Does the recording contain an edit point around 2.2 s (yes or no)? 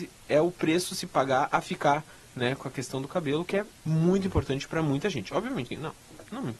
no